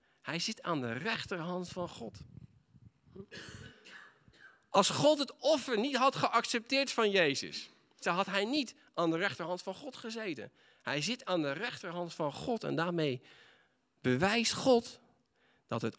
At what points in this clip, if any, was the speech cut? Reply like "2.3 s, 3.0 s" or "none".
8.0 s